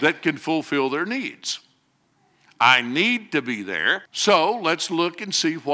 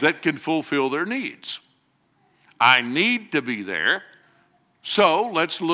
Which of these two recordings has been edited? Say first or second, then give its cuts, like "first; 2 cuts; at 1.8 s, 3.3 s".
first; 1 cut; at 4.1 s